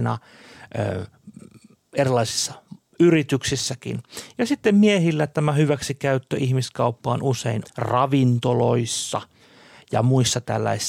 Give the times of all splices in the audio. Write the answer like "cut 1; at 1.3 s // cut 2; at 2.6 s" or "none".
cut 1; at 7.6 s